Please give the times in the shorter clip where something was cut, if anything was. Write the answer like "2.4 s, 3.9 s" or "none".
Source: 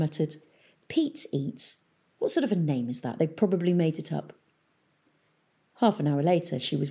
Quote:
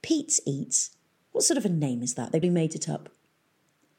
2.4 s